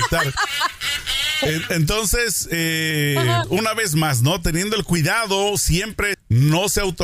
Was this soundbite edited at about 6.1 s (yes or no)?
yes